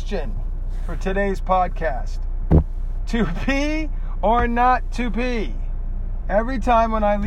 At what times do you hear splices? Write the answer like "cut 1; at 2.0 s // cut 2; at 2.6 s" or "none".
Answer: cut 1; at 3.0 s // cut 2; at 6.2 s